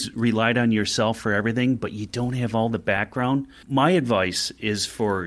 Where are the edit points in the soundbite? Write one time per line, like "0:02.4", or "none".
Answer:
none